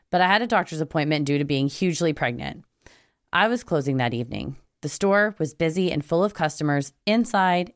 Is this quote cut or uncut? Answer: uncut